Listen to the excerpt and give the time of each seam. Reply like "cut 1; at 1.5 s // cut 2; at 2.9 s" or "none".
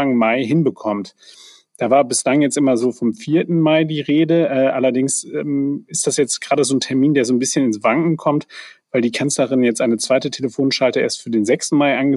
none